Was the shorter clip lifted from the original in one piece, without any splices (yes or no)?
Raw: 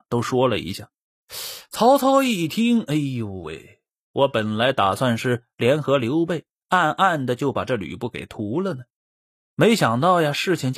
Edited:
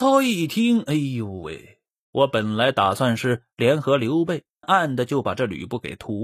no